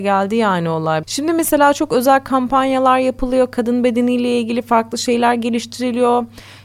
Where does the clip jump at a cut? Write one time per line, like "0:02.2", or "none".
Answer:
0:01.0